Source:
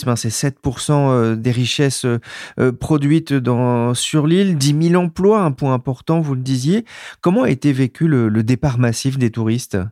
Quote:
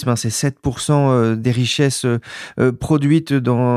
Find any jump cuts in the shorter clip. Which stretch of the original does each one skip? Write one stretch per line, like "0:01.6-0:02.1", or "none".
none